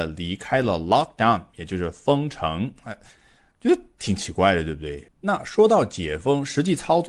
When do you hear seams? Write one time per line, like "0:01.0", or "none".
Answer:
0:05.1